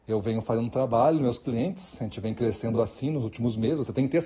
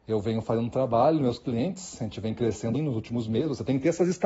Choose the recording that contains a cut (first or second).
second